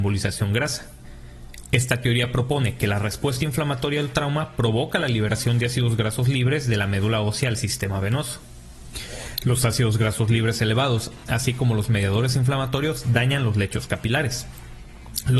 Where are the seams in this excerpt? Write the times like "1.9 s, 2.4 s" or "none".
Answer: none